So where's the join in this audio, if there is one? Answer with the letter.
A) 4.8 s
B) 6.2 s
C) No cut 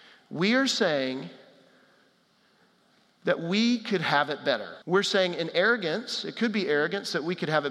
A